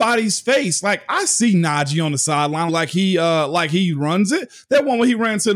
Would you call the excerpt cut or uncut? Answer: cut